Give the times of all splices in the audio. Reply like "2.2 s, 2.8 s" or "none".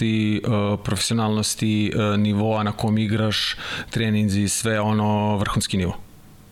none